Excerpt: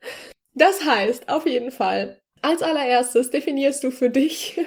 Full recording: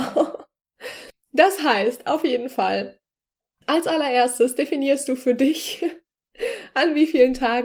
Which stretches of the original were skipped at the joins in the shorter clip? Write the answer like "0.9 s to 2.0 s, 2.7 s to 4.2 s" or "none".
3.1 s to 3.5 s